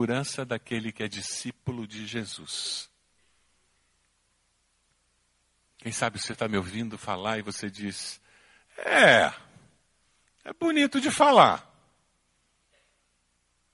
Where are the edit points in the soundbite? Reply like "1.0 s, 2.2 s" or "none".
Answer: none